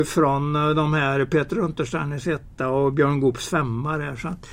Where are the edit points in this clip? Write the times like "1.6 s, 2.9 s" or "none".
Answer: none